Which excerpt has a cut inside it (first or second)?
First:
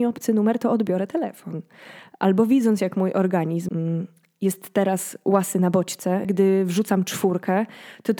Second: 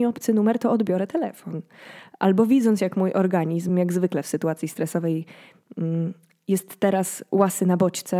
first